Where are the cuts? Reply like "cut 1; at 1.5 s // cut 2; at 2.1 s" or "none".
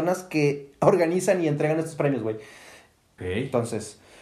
cut 1; at 3.2 s